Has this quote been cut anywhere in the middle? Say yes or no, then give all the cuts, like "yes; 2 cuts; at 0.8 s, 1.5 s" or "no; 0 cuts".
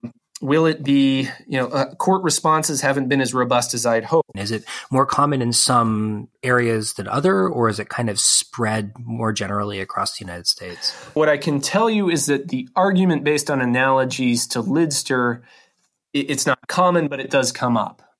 yes; 3 cuts; at 4.3 s, 6.4 s, 11.2 s